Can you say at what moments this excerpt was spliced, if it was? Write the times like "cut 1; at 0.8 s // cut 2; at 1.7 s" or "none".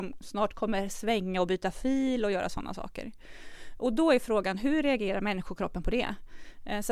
none